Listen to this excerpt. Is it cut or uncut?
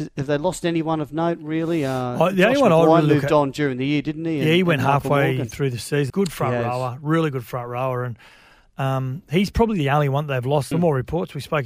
cut